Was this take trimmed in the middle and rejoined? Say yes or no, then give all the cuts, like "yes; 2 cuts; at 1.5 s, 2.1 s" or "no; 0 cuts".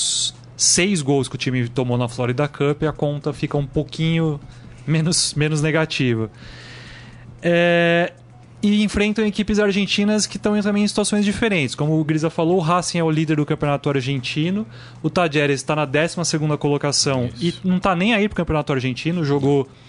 no; 0 cuts